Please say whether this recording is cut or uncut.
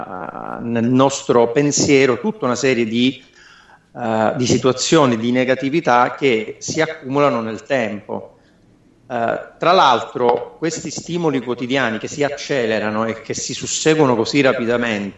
uncut